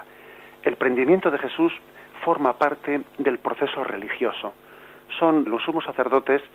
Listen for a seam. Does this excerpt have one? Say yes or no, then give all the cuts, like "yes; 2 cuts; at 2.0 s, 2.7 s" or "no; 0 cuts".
yes; 1 cut; at 5.4 s